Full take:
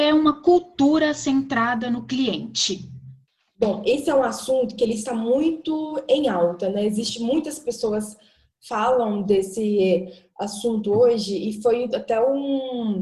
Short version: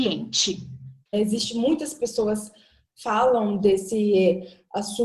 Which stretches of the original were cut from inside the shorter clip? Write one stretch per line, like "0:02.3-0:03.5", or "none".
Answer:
0:03.3-0:06.8